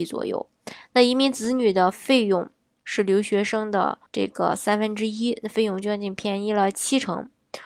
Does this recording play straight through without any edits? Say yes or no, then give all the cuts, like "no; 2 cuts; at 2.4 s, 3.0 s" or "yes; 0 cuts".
no; 1 cut; at 4.1 s